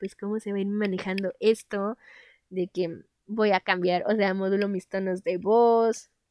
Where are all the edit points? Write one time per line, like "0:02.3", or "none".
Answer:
none